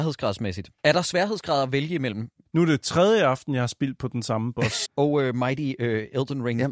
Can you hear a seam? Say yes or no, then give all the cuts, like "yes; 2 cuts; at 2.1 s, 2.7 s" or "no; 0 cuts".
yes; 2 cuts; at 2.5 s, 4.9 s